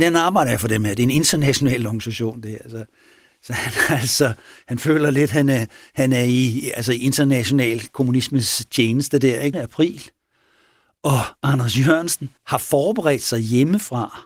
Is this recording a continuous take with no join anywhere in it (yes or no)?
no